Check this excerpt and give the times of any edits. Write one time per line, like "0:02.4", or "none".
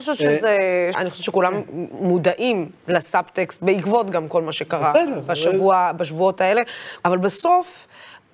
0:00.9
0:07.0